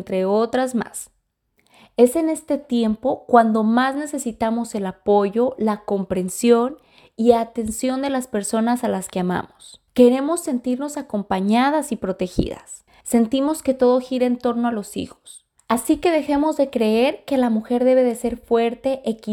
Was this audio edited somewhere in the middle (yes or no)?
yes